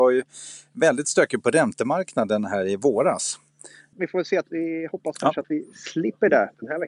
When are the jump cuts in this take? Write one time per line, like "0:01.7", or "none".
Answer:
0:03.9